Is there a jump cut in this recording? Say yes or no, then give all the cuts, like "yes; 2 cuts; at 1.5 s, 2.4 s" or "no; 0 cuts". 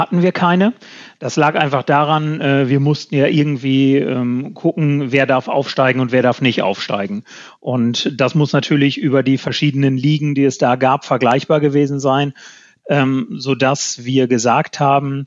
no; 0 cuts